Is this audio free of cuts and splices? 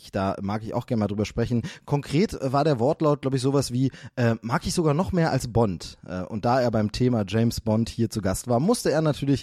yes; 0 cuts

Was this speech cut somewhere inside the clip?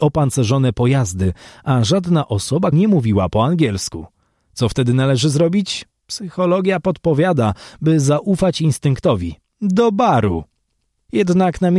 yes; 2 cuts; at 2.7 s, 9.4 s

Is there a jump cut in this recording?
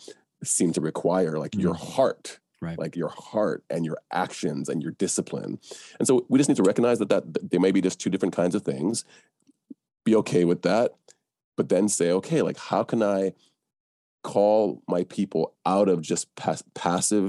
yes; 1 cut; at 2.9 s

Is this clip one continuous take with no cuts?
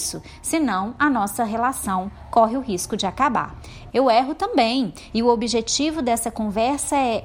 no; 2 cuts; at 3.9 s, 5.1 s

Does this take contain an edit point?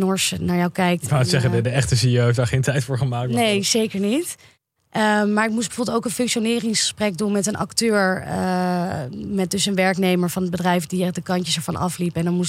no; 0 cuts

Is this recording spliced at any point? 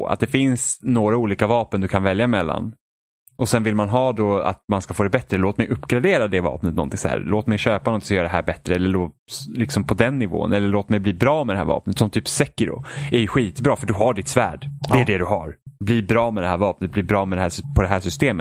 no; 0 cuts

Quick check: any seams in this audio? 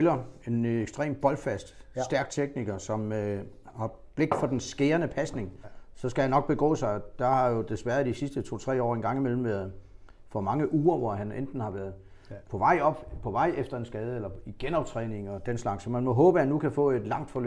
yes; 1 cut; at 5.6 s

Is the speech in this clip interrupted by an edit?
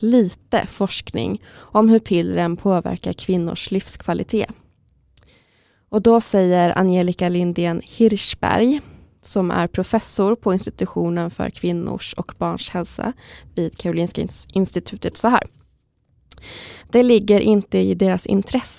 yes; 1 cut; at 16.8 s

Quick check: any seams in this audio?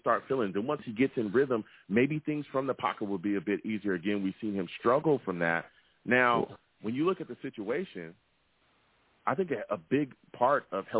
no; 0 cuts

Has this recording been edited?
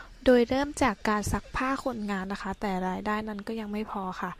no; 0 cuts

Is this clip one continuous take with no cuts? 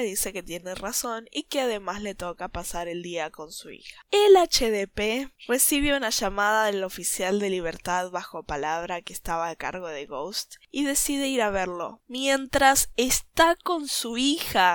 yes; 0 cuts

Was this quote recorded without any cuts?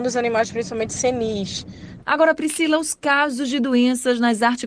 no; 1 cut; at 2.0 s

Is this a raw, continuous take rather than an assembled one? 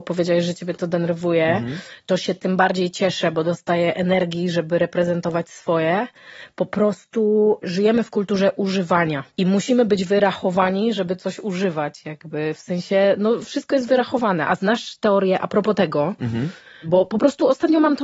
no; 1 cut; at 9.3 s

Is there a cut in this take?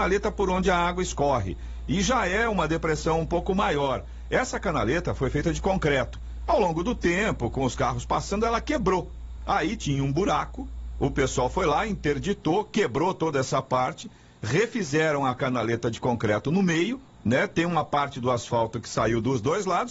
no; 0 cuts

